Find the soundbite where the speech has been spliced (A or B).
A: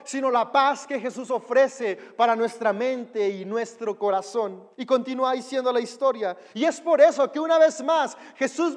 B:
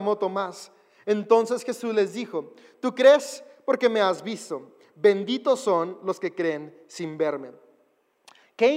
A